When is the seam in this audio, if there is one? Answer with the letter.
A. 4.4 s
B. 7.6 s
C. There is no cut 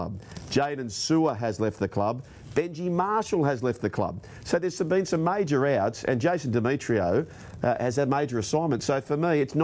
C